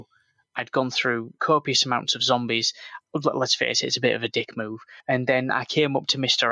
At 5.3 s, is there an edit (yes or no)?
no